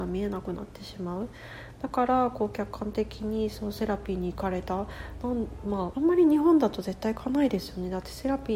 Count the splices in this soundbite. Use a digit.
1